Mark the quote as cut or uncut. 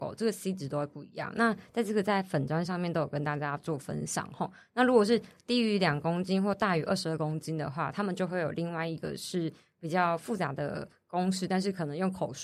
uncut